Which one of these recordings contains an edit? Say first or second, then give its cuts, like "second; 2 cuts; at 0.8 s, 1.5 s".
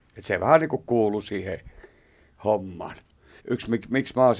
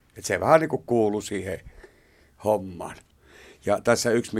first; 1 cut; at 3.4 s